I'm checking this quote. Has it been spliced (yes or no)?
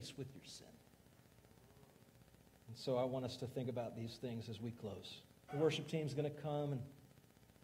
yes